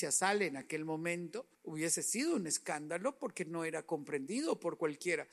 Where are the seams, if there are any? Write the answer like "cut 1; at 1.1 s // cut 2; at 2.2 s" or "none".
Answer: cut 1; at 1.5 s